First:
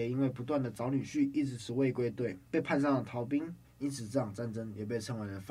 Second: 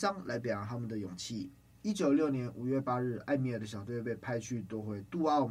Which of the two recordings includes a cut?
first; 2 cuts; at 1.6 s, 3.6 s

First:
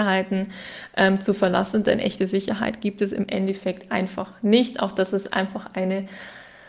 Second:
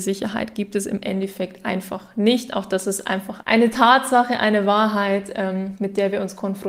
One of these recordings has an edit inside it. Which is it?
second; 1 cut; at 3.4 s

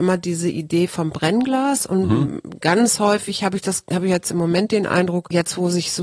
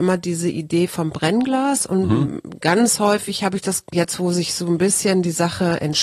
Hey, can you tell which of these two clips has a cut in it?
second; 1 cut; at 3.9 s

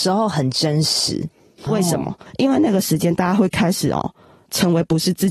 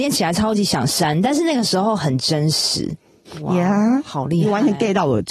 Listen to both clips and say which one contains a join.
first; 1 cut; at 1.7 s

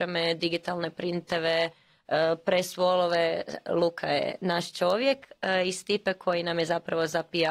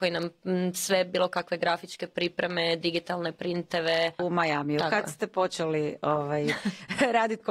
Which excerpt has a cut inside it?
second; 1 cut; at 4.2 s

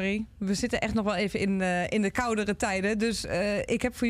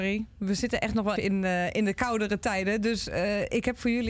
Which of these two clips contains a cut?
second; 1 cut; at 1.2 s

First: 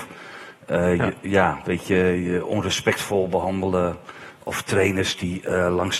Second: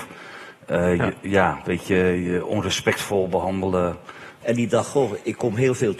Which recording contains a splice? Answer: second; 1 cut; at 4.4 s

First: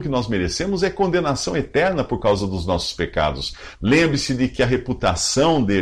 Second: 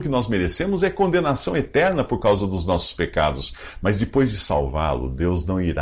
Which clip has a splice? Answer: first; 1 cut; at 3.7 s

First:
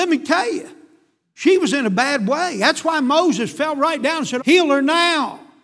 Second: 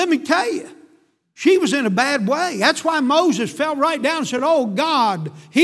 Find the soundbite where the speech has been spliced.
first; 1 cut; at 4.4 s

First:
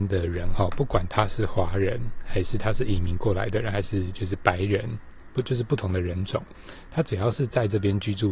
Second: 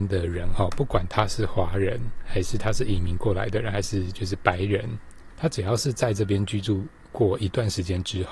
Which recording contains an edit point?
second; 1 cut; at 5.3 s

